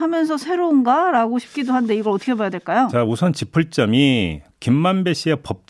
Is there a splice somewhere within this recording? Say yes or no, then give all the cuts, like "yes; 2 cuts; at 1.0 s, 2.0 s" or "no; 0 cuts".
no; 0 cuts